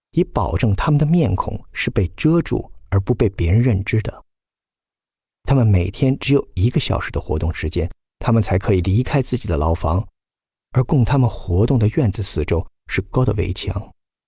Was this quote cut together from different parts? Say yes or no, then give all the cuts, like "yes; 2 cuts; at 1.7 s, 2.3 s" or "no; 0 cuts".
yes; 2 cuts; at 8.1 s, 13.1 s